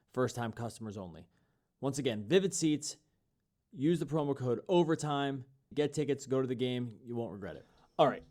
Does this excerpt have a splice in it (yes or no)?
yes